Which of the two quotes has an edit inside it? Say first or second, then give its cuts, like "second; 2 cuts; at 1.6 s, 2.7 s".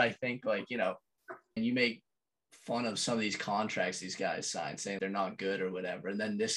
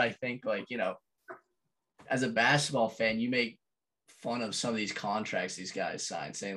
first; 2 cuts; at 1.6 s, 5.0 s